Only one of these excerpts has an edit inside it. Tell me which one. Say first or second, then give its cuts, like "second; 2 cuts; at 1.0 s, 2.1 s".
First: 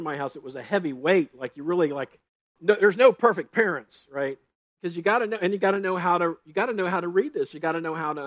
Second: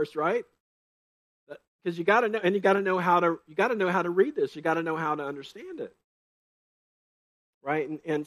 first; 2 cuts; at 2.6 s, 4.7 s